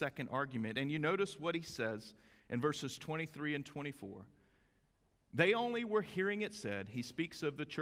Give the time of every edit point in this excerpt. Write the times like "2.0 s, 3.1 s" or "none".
none